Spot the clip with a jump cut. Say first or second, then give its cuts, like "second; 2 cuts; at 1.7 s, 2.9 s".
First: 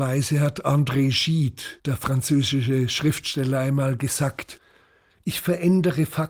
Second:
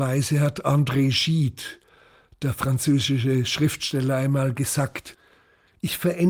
first; 1 cut; at 1.8 s